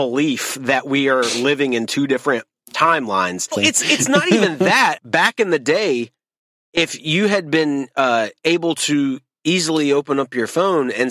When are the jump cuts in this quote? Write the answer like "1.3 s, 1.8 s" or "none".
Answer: 3.5 s, 5.0 s